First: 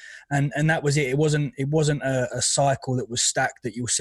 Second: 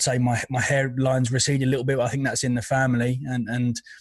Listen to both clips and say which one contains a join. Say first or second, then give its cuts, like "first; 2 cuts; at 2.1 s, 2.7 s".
first; 1 cut; at 2.3 s